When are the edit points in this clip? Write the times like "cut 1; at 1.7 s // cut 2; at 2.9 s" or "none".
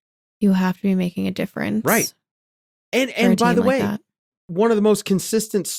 cut 1; at 4.3 s